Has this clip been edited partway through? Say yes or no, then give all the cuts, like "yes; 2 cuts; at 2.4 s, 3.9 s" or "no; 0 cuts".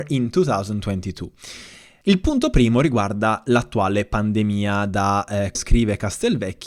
yes; 2 cuts; at 2.0 s, 5.6 s